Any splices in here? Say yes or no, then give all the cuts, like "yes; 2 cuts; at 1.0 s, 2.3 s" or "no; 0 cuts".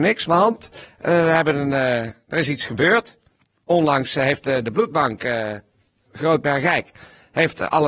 no; 0 cuts